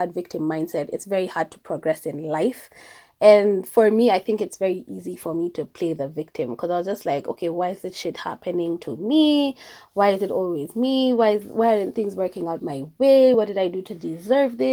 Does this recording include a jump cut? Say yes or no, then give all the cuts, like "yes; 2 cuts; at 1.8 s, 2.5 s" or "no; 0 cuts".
no; 0 cuts